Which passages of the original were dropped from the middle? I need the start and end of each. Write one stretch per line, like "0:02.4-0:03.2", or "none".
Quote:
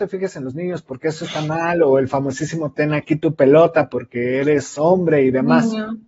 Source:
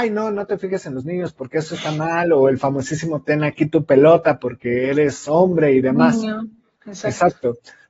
none